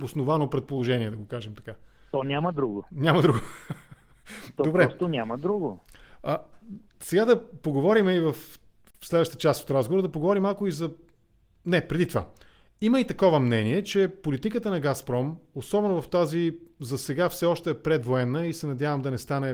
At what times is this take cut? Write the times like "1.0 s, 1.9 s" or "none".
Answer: none